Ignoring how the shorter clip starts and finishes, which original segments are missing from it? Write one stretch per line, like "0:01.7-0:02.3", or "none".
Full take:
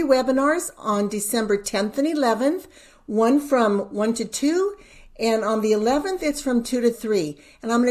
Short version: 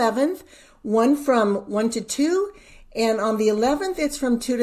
none